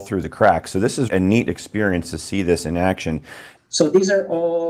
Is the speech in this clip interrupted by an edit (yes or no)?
yes